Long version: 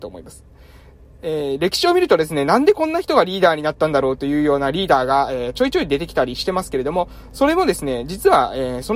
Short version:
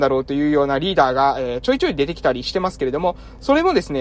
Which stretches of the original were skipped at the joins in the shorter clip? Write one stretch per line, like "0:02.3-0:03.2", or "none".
none